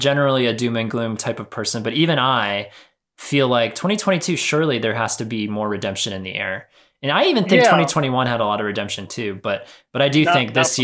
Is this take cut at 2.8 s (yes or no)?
no